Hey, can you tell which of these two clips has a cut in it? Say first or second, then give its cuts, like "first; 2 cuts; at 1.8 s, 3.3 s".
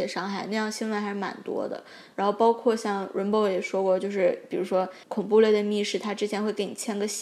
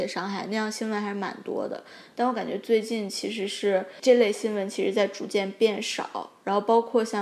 first; 1 cut; at 2.1 s